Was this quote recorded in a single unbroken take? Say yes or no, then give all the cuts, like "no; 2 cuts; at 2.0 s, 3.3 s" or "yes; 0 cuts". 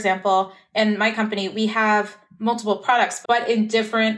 no; 1 cut; at 3.2 s